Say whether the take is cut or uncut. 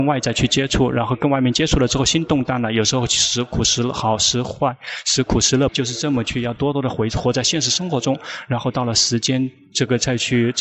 cut